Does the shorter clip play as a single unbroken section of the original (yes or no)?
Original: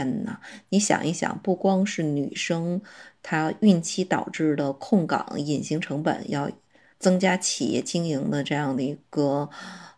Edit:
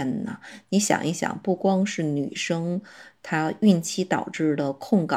yes